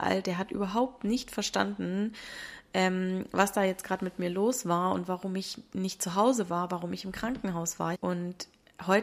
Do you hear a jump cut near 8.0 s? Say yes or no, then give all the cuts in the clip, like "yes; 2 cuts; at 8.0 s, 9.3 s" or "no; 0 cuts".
yes; 1 cut; at 8.0 s